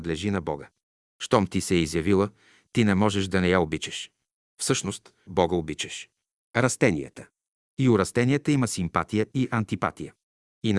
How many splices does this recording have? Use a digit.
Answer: 1